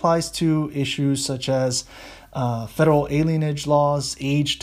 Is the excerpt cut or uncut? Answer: uncut